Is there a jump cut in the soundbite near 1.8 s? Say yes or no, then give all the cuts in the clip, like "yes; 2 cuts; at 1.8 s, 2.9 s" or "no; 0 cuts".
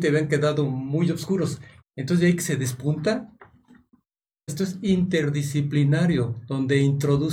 yes; 2 cuts; at 1.8 s, 4.5 s